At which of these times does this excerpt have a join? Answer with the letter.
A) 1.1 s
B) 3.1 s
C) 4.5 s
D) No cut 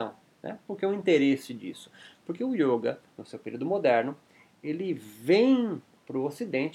B